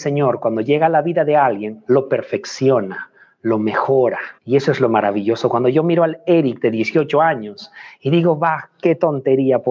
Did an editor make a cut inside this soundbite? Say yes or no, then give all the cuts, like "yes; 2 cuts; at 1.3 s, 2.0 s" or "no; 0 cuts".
yes; 1 cut; at 4.4 s